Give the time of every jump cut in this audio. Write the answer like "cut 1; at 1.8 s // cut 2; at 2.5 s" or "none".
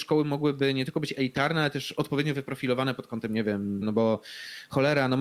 cut 1; at 3.8 s